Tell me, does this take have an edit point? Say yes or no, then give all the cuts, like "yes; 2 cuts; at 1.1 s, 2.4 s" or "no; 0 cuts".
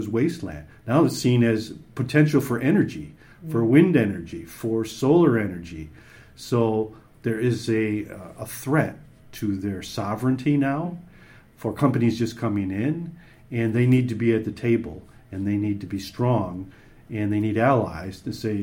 no; 0 cuts